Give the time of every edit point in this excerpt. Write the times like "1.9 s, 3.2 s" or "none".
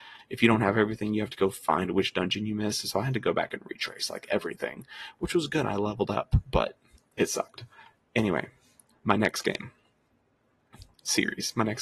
none